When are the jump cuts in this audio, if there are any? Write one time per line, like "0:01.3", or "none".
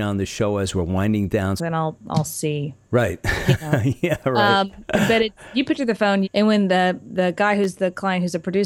0:01.6
0:06.2